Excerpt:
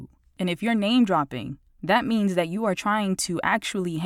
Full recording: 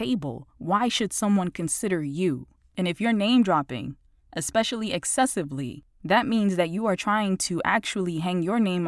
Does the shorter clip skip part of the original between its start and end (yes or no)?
yes